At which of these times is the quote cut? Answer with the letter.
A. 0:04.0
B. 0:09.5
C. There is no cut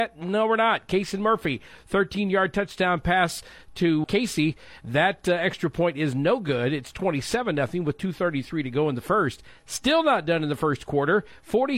A